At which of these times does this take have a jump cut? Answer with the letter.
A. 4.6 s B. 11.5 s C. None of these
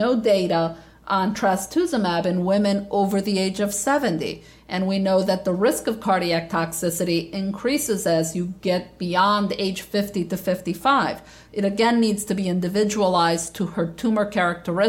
B